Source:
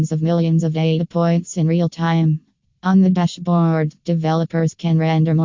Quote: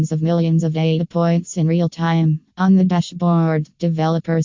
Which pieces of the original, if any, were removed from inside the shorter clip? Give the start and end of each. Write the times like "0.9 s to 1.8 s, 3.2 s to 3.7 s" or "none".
2.5 s to 2.8 s